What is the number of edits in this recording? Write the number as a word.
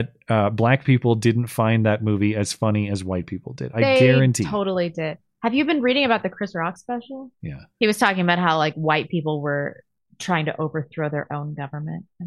one